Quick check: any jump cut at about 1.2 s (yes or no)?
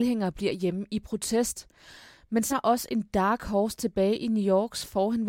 no